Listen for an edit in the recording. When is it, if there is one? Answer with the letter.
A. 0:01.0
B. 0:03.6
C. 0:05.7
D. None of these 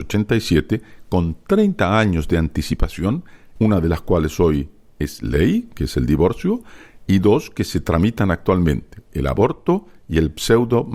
B